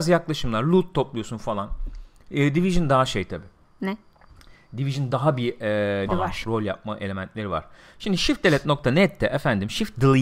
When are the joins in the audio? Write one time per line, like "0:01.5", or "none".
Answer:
0:06.1